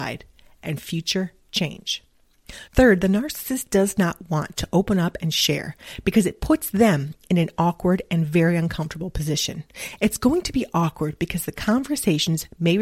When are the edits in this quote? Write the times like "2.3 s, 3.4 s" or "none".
2.7 s